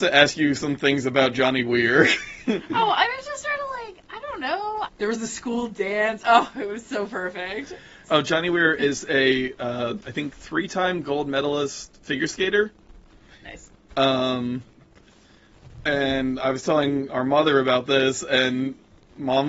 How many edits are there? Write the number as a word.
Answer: two